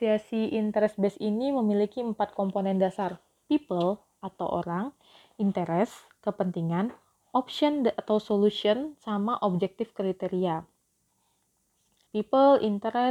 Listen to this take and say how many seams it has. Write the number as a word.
one